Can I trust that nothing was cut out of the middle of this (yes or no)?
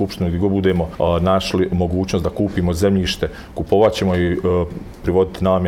yes